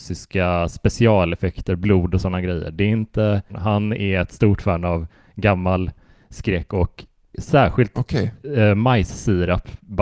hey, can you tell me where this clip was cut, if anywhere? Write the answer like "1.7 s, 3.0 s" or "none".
3.5 s